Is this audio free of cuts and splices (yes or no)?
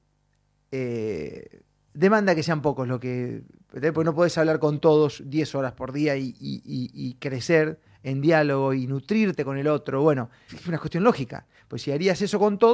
no